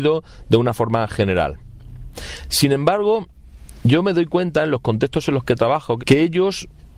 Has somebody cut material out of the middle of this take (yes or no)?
yes